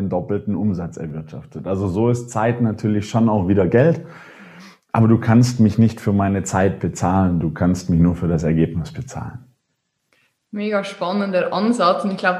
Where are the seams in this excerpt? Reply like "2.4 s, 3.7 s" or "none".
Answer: none